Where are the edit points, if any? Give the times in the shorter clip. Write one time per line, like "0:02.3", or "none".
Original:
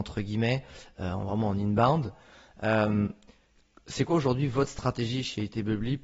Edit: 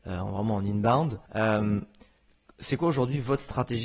0:01.3